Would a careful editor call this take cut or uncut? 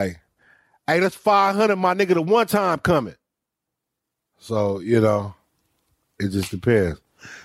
uncut